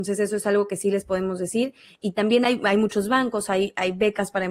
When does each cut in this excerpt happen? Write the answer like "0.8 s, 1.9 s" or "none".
none